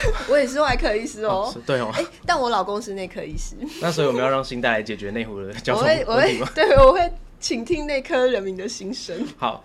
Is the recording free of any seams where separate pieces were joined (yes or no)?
yes